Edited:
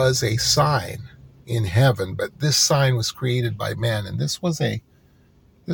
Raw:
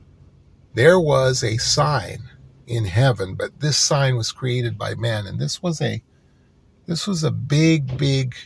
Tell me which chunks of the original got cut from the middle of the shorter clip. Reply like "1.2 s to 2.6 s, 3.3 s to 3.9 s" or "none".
none